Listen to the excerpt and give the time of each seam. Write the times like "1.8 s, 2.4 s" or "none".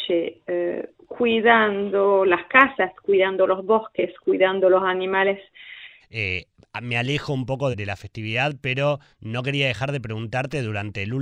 6.0 s, 7.7 s